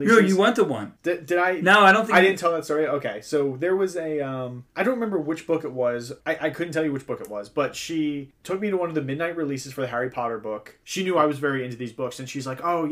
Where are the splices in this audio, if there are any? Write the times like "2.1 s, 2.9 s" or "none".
none